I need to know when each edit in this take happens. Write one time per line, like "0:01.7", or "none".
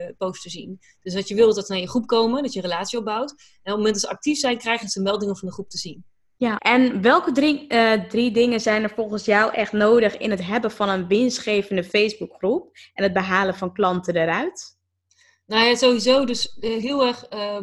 0:06.6